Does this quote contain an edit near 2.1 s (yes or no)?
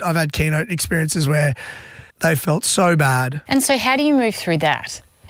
yes